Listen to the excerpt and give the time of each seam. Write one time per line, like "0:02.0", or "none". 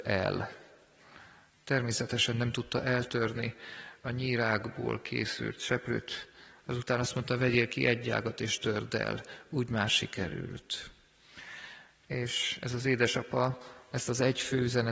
none